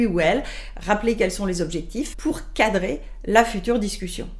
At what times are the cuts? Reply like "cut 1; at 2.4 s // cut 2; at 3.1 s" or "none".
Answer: cut 1; at 2.1 s